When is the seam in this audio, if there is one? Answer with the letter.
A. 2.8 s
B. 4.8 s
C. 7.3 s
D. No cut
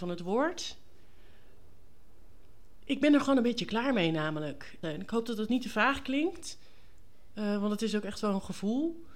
B